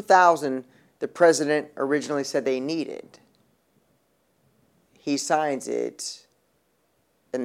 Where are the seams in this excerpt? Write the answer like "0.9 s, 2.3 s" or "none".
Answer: 4.9 s